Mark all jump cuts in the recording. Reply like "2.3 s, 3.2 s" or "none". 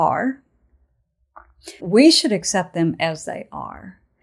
1.8 s